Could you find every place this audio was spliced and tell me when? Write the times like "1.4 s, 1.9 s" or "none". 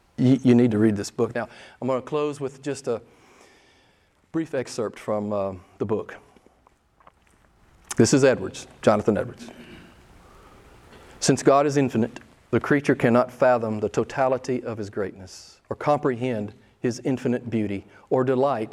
1.3 s, 7.9 s